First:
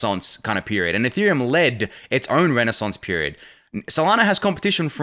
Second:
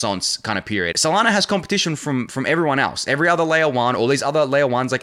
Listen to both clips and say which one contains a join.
second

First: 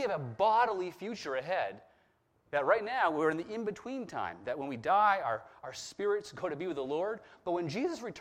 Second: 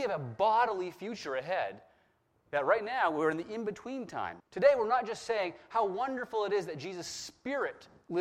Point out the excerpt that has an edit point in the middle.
second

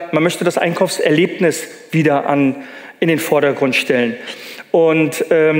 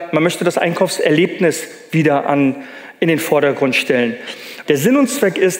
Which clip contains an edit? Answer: second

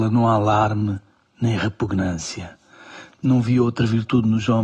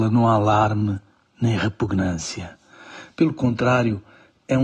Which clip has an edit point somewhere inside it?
first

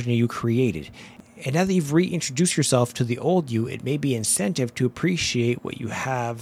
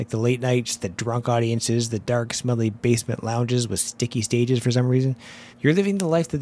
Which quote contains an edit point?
second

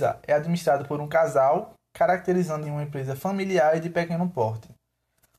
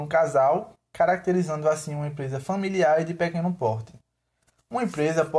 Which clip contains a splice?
first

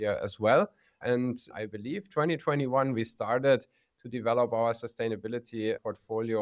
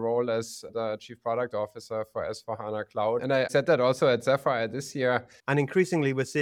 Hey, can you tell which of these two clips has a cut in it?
second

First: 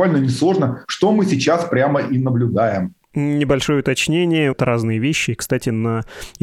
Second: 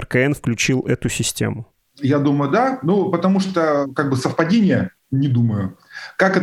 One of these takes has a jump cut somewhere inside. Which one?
first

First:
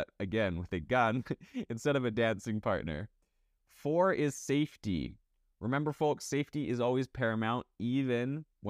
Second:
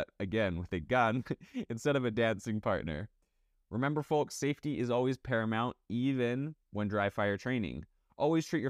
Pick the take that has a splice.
second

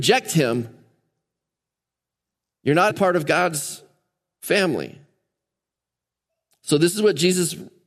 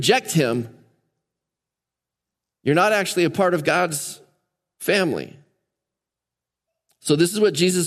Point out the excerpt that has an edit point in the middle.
first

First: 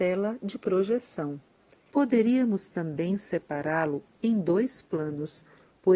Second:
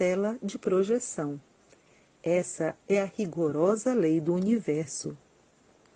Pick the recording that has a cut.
first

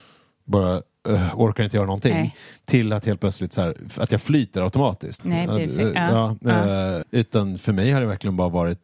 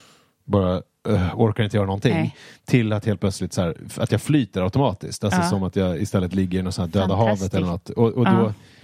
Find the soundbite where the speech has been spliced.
first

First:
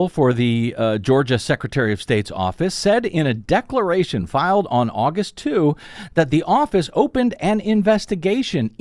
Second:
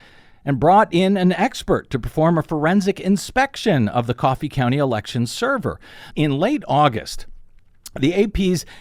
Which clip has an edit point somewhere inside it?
second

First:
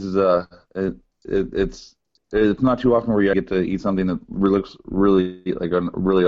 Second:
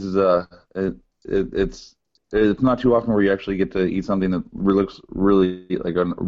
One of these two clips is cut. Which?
first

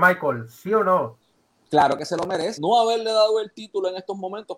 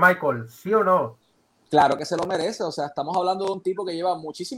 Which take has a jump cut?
first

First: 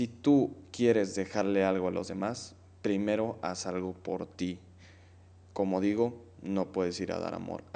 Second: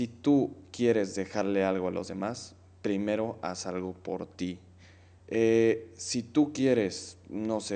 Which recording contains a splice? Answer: second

